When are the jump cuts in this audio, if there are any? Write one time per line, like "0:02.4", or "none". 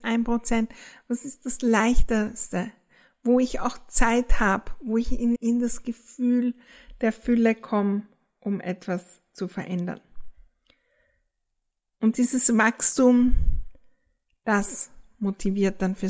0:05.3